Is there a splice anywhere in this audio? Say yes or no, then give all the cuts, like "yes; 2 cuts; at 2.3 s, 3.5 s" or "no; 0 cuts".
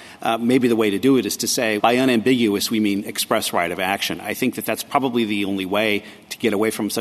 yes; 1 cut; at 1.8 s